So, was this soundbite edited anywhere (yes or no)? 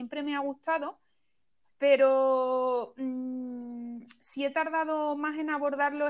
no